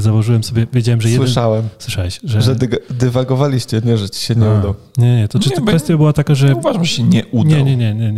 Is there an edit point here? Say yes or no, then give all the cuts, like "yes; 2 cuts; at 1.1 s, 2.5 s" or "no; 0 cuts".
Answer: no; 0 cuts